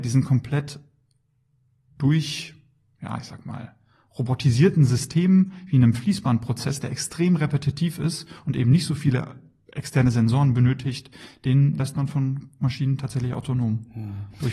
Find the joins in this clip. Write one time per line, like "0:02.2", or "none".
none